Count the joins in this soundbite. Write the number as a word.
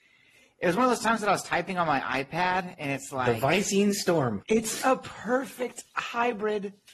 one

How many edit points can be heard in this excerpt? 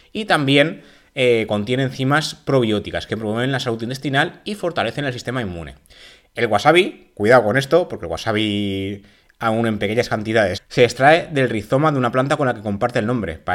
one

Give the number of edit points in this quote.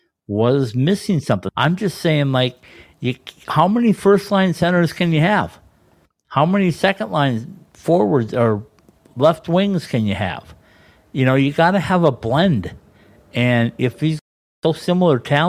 one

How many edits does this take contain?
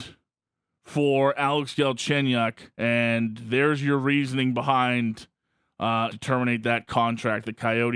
two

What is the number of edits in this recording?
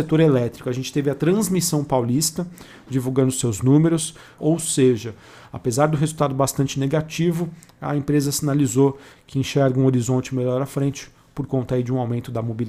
one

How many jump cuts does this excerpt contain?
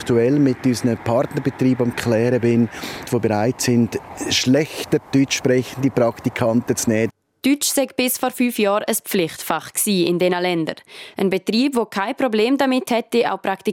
two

